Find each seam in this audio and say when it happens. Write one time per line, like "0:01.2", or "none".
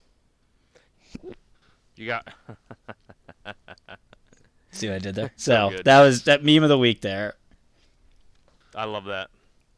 0:00.9
0:05.4